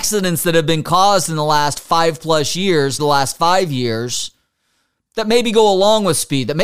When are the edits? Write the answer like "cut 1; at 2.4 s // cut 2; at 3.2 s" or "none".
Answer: cut 1; at 3.0 s